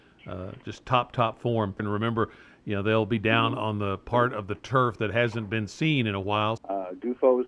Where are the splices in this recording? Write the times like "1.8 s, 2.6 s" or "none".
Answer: 1.8 s, 6.6 s